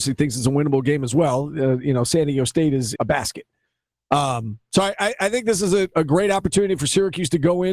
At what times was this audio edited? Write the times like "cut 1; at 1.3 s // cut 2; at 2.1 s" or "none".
cut 1; at 3.0 s